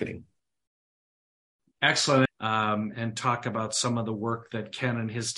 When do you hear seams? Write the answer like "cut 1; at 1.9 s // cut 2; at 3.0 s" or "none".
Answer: cut 1; at 2.3 s